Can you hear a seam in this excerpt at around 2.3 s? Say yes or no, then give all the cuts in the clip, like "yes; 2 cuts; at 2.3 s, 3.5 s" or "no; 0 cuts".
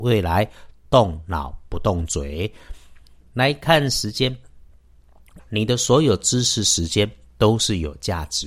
no; 1 cut; at 5.4 s